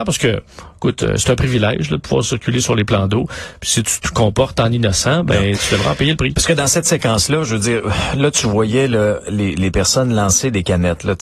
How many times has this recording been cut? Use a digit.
0